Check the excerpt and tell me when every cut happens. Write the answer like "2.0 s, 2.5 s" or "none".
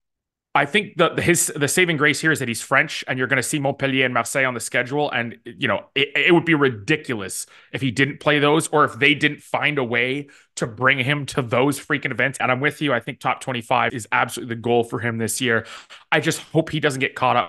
12.4 s, 13.9 s